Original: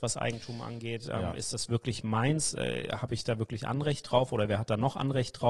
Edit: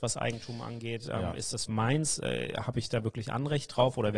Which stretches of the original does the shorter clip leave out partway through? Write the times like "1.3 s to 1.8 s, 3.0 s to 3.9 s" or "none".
1.7 s to 2.0 s